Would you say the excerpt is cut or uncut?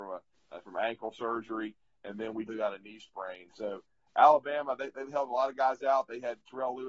cut